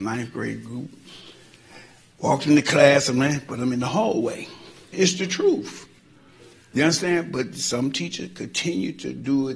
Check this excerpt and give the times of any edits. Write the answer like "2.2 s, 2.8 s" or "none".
4.9 s